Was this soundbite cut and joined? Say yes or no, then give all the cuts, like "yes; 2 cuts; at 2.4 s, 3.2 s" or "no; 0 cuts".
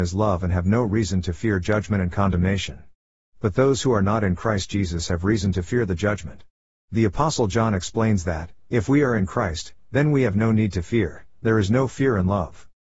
no; 0 cuts